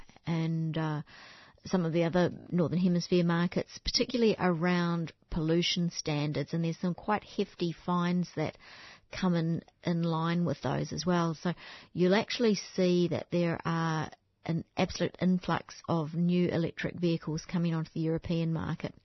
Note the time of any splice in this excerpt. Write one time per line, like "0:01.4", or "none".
none